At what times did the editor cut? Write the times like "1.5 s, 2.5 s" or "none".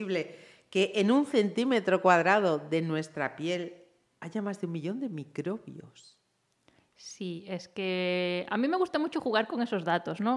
none

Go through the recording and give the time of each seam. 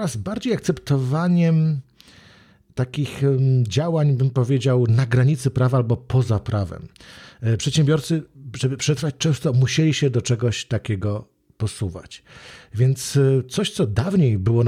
none

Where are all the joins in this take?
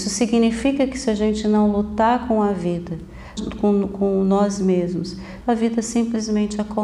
3.4 s, 5.4 s

